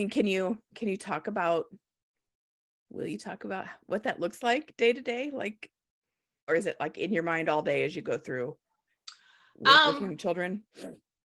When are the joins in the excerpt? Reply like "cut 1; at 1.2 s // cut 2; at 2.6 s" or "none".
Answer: cut 1; at 6.5 s